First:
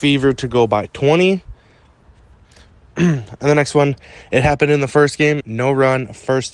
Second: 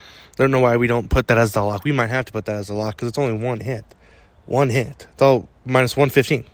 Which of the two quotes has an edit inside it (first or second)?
first